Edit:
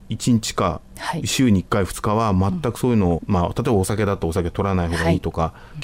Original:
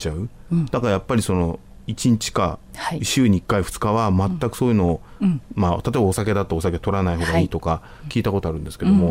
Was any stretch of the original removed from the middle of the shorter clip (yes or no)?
yes